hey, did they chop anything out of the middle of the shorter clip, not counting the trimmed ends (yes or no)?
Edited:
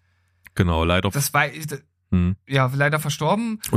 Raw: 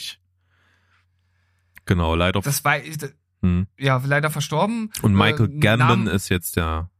no